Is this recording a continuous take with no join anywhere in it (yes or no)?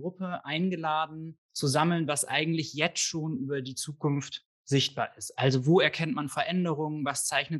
yes